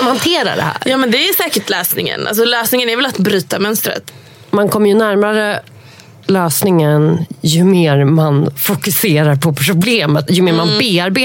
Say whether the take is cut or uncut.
cut